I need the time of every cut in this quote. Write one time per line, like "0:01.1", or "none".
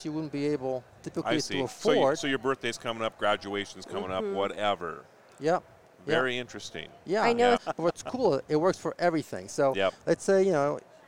0:07.6